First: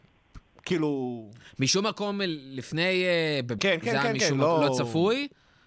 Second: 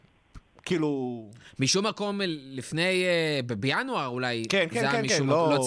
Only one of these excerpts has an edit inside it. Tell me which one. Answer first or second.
first